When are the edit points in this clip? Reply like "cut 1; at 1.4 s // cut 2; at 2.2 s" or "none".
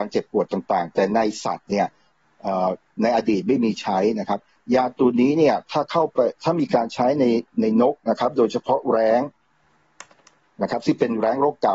none

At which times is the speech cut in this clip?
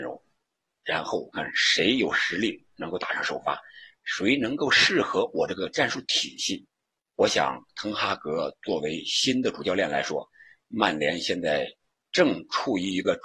cut 1; at 1.3 s // cut 2; at 7.1 s

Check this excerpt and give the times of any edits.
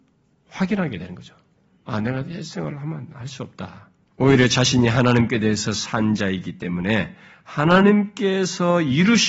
cut 1; at 4.1 s

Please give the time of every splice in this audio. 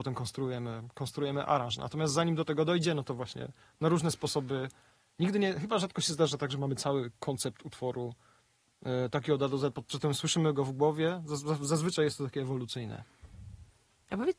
none

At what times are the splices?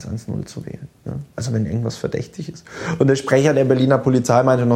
none

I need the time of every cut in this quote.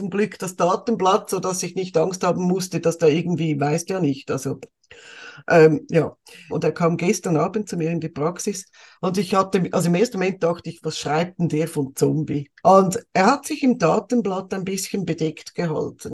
cut 1; at 6.5 s // cut 2; at 8.9 s // cut 3; at 12.6 s

